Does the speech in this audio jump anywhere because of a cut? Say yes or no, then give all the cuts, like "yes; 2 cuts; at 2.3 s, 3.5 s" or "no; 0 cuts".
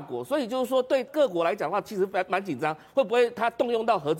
yes; 1 cut; at 1.1 s